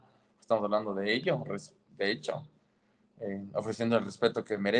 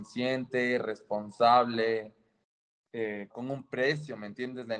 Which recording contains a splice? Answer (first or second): second